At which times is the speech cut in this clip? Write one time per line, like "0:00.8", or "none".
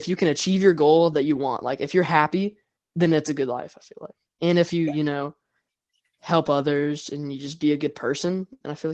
none